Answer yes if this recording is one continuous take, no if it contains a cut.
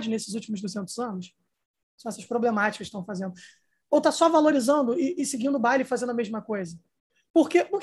no